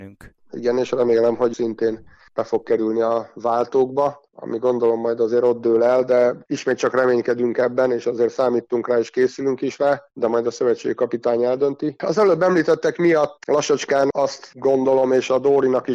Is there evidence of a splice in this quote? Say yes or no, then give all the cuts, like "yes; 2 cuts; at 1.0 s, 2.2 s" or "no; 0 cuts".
no; 0 cuts